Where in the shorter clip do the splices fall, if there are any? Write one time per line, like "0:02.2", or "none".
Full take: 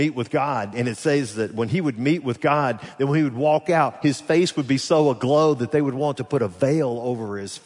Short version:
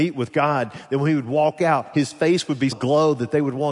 0:02.7